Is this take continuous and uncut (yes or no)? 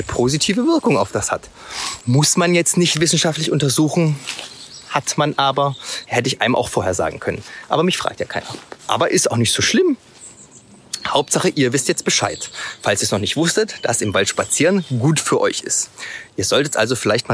no